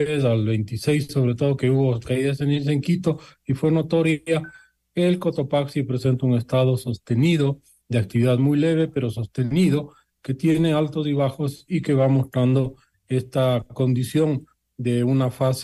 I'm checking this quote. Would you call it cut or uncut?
uncut